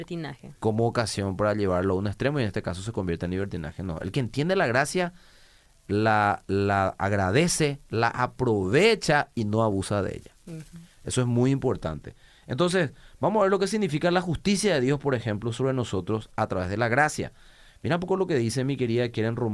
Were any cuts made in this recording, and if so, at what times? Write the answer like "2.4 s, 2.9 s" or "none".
none